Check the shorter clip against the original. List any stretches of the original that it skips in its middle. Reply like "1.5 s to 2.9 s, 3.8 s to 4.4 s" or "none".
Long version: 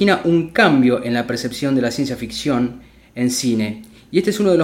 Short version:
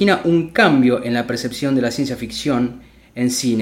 none